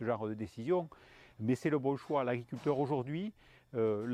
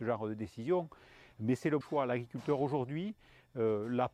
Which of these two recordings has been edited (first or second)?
second